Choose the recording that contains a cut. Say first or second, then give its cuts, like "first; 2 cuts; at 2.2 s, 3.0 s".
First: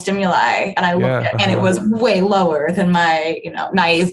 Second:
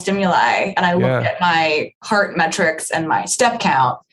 first; 1 cut; at 1.3 s